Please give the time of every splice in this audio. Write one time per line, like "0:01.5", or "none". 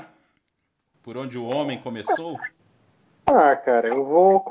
none